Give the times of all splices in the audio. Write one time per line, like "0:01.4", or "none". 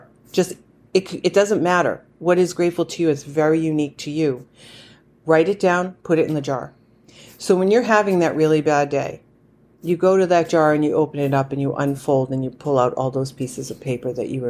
none